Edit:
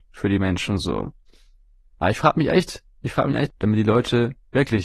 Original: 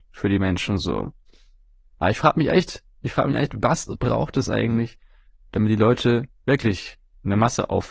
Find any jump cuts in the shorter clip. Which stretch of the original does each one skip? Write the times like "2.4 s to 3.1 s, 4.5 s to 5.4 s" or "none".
3.5 s to 5.4 s